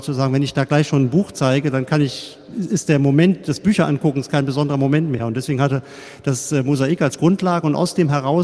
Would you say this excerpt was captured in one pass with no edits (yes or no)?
yes